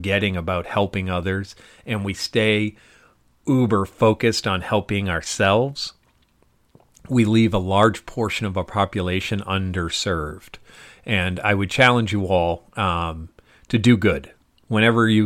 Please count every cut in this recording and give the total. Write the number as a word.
zero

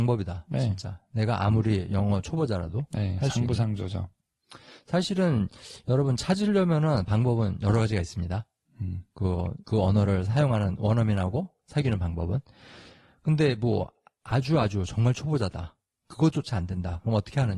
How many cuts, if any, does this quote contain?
zero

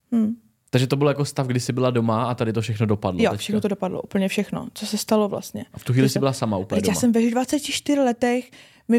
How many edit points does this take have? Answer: zero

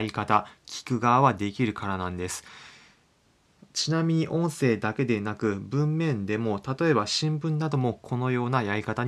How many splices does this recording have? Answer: zero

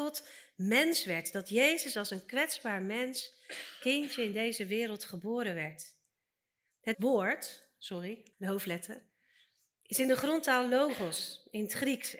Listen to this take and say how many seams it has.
two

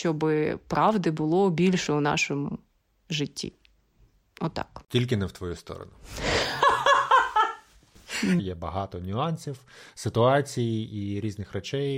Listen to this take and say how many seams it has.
one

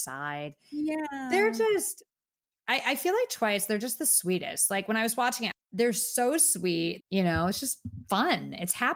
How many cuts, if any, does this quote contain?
two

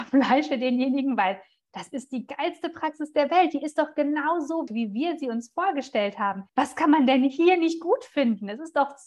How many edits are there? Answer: two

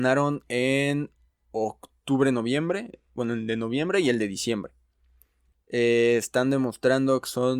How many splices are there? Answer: one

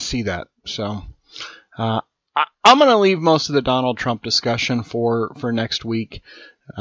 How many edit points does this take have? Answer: zero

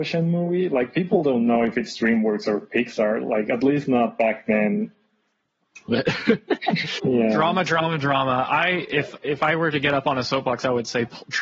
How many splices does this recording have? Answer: two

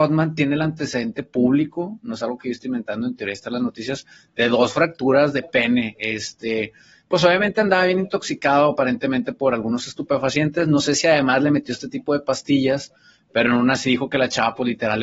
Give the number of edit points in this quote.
zero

